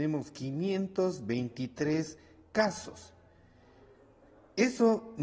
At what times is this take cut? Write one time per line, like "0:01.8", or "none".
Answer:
none